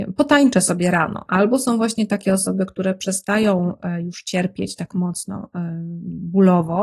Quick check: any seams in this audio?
yes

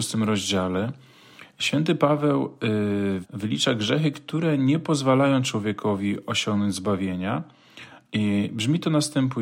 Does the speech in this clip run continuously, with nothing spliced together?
no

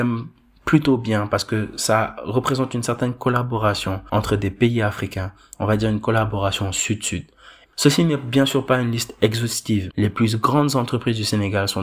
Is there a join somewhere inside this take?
yes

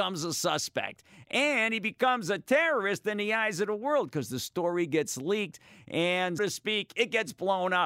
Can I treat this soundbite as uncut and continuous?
no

